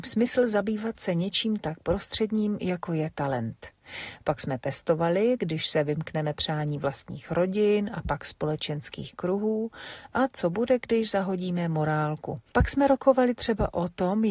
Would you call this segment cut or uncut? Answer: cut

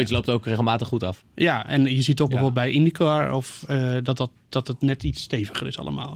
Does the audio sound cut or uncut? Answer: uncut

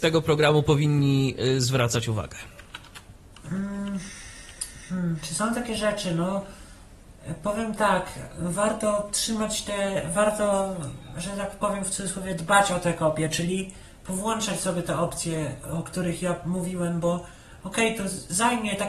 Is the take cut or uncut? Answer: uncut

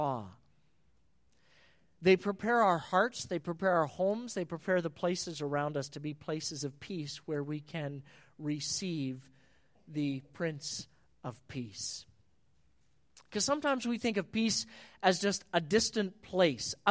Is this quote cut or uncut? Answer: uncut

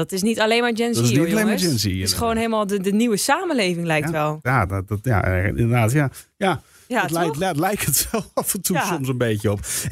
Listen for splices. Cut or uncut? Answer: uncut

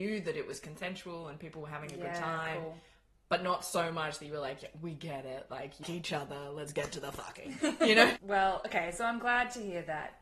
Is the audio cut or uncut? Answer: cut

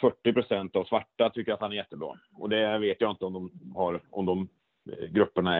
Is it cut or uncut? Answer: cut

